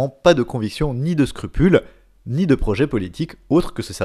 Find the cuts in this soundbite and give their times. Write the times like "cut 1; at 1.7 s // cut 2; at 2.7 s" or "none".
none